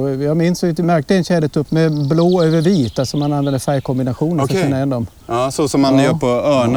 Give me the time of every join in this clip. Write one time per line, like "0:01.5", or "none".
0:01.7

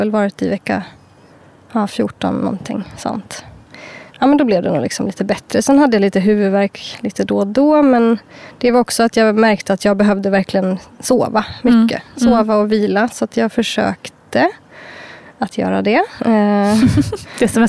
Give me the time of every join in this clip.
0:04.1

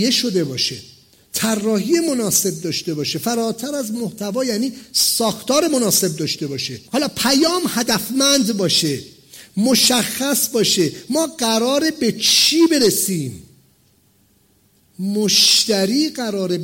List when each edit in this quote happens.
none

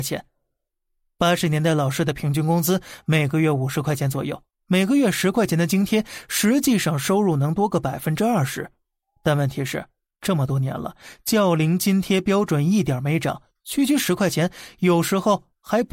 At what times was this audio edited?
none

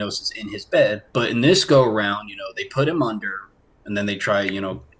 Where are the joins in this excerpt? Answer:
0:01.1

